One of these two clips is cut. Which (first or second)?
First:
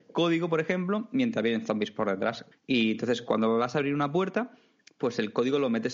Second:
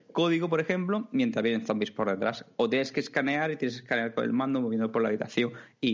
first